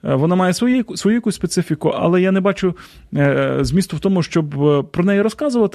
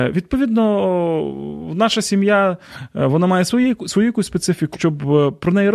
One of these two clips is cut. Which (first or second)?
second